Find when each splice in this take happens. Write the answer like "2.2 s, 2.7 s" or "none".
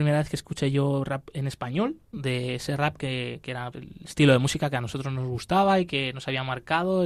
2.1 s, 3.7 s